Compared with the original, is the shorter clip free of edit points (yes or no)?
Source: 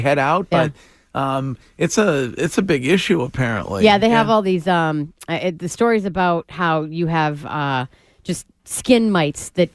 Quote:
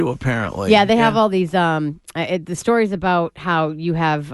yes